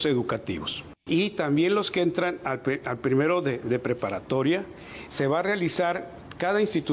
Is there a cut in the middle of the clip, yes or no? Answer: yes